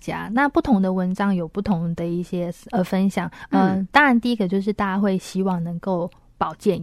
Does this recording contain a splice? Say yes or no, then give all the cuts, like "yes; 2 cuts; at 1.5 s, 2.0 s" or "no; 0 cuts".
yes; 1 cut; at 2.7 s